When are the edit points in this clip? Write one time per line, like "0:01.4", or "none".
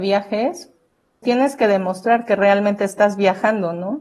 0:01.2